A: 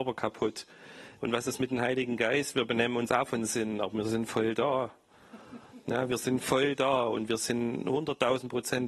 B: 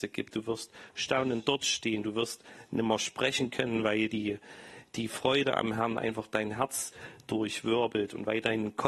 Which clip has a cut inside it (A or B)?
A